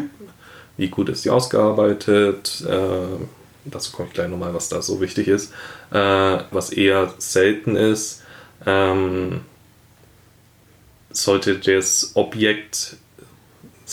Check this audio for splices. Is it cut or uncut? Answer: cut